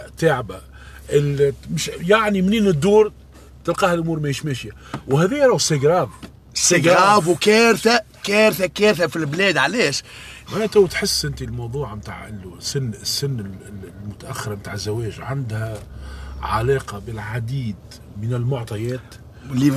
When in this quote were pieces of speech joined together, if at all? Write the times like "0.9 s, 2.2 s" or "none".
10.5 s